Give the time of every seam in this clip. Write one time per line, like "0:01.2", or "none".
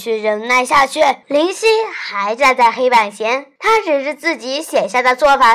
0:01.2
0:03.6